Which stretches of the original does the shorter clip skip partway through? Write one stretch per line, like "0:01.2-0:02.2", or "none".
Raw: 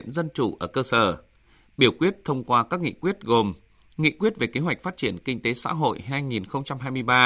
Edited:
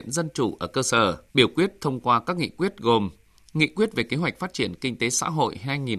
0:01.3-0:01.7